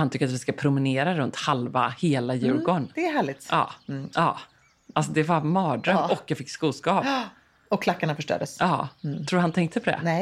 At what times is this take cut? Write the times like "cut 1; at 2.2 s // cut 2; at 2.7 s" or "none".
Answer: cut 1; at 4.1 s